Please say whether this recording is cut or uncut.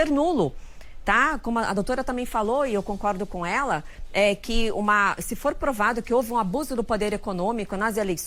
uncut